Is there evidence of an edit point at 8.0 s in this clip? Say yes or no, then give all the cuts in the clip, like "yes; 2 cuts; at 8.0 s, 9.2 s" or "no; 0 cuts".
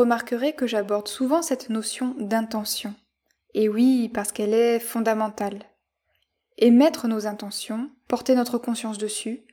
yes; 1 cut; at 8.0 s